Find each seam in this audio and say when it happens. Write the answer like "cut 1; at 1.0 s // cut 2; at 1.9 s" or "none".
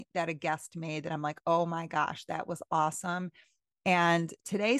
cut 1; at 3.7 s